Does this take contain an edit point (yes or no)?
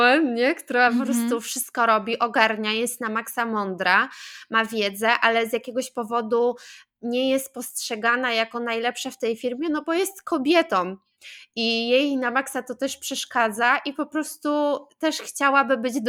no